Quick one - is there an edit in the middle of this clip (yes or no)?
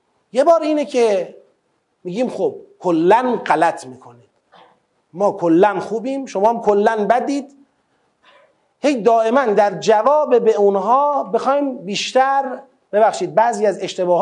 no